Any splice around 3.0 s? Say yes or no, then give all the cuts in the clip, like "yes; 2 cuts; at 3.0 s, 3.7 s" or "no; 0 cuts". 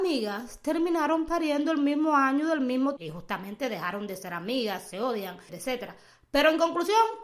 yes; 2 cuts; at 3.0 s, 5.5 s